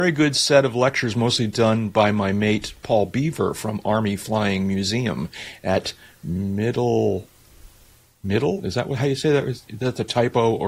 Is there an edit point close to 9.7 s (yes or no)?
yes